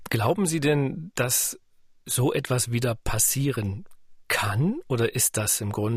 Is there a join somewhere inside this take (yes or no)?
no